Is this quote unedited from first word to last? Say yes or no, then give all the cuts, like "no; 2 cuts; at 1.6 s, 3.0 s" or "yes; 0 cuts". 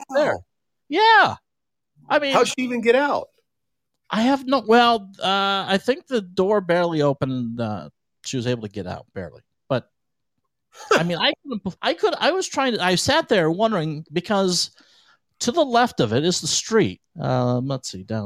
no; 2 cuts; at 11.8 s, 17.1 s